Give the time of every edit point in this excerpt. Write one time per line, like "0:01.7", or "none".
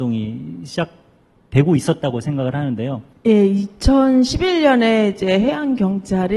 0:03.1